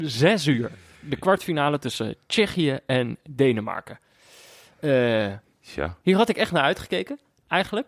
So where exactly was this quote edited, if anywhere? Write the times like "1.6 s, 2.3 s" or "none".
6.0 s